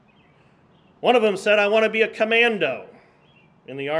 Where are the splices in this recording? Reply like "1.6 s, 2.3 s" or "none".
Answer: none